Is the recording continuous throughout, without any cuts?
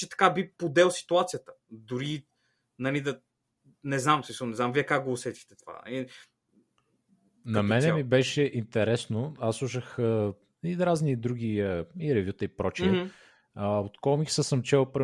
yes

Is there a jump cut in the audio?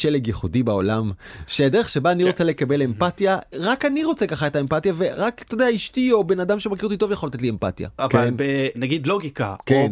yes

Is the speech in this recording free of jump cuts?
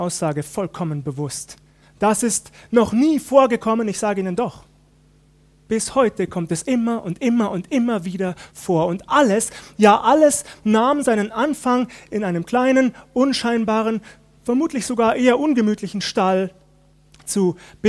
no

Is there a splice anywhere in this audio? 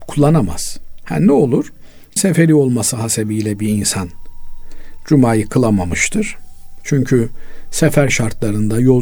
yes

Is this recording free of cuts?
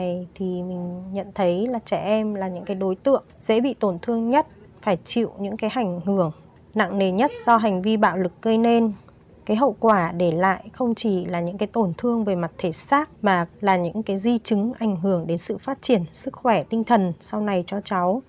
yes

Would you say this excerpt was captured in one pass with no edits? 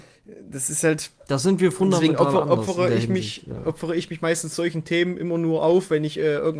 yes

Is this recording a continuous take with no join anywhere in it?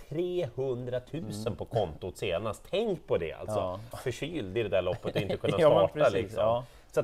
no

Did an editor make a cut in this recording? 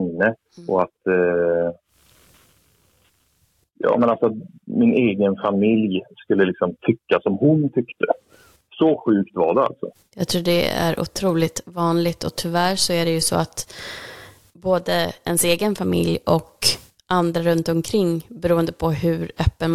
yes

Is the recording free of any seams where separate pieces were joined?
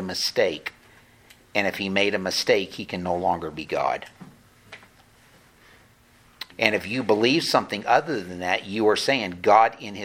no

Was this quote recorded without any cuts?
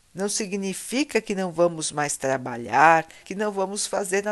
no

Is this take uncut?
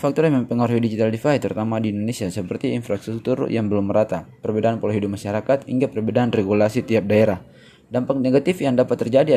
yes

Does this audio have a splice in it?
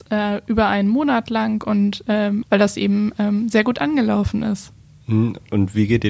yes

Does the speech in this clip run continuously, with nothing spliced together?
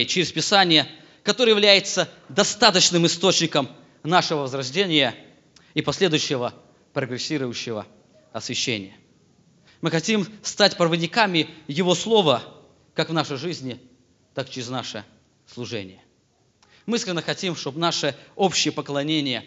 no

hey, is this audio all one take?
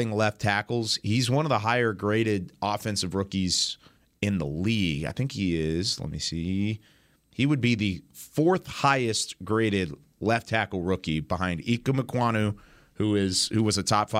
yes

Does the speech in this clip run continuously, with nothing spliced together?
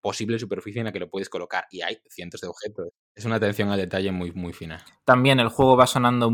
yes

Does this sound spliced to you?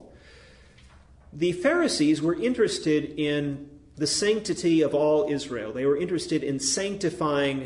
no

